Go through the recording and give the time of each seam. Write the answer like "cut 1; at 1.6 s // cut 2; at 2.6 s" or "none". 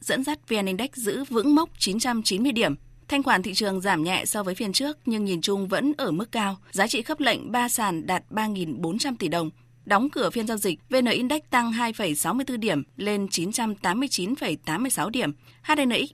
none